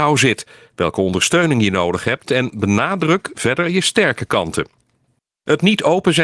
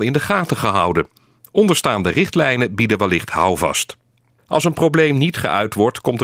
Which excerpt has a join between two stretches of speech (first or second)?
second